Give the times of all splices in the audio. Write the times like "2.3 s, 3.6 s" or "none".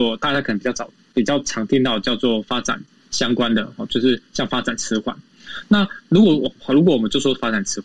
none